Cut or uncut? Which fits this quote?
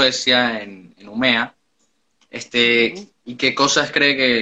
cut